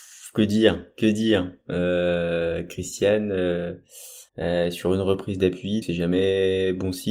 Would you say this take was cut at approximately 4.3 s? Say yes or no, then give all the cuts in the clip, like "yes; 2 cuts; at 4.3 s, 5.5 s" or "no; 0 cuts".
yes; 2 cuts; at 4.3 s, 5.8 s